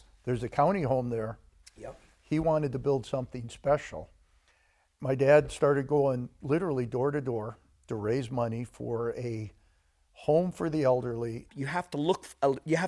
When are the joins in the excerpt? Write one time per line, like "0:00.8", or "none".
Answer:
0:01.6
0:04.9
0:11.5